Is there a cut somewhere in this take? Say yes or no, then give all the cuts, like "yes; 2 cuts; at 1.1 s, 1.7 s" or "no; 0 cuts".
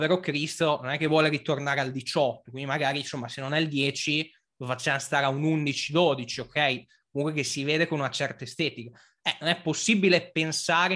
no; 0 cuts